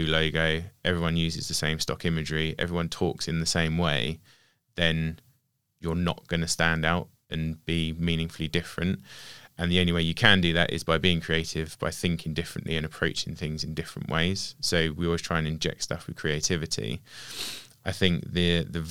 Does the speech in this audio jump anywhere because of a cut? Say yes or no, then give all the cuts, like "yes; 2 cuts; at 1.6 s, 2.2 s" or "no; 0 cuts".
no; 0 cuts